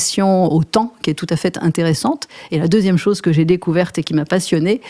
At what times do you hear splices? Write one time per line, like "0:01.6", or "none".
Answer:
none